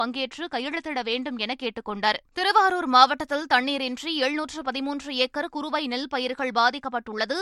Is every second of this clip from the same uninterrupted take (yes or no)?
no